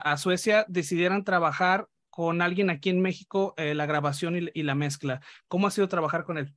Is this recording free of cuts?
yes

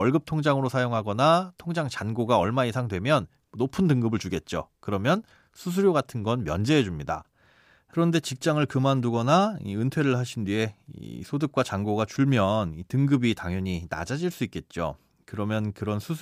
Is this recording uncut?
yes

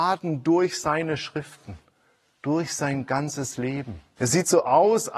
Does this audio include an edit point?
yes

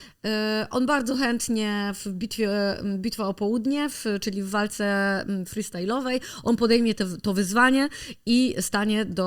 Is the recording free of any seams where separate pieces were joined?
yes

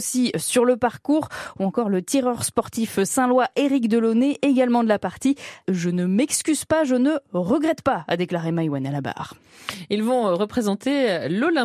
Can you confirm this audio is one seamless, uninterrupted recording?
no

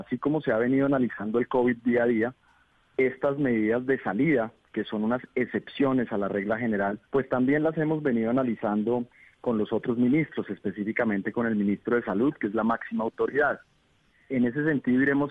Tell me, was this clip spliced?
yes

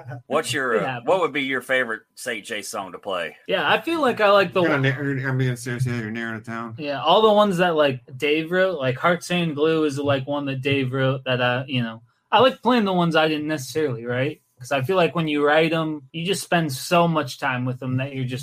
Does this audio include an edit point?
no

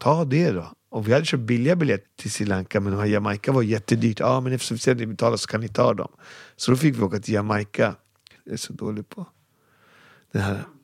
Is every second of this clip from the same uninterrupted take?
no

